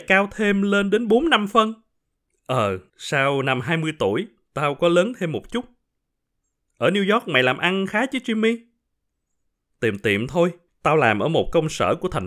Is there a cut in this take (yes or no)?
no